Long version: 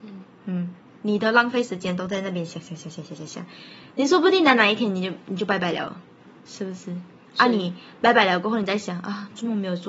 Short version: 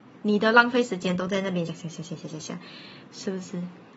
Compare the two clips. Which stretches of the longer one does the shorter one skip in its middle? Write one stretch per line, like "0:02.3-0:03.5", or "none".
0:02.5-0:02.5
0:03.9-0:06.4